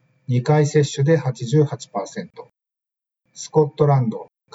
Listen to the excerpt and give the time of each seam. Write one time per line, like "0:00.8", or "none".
none